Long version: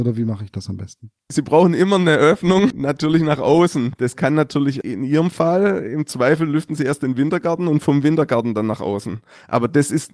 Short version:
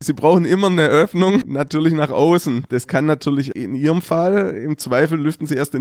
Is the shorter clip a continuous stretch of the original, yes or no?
yes